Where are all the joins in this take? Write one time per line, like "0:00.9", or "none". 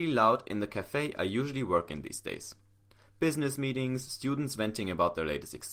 none